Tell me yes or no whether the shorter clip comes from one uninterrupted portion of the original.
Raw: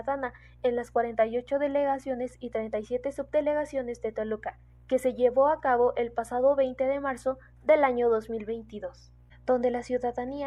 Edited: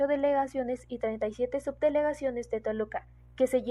yes